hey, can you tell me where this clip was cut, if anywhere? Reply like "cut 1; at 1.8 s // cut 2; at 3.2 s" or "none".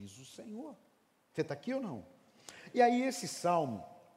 none